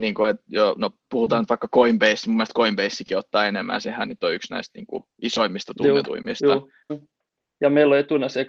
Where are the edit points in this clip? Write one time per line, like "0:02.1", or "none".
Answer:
0:06.9